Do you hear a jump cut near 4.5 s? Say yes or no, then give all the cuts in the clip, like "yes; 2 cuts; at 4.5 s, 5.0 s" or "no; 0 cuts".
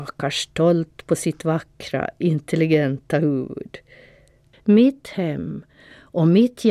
yes; 1 cut; at 4.5 s